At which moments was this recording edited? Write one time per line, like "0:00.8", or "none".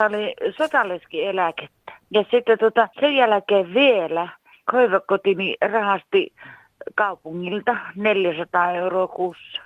0:02.9